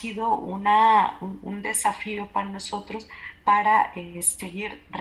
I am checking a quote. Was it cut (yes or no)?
no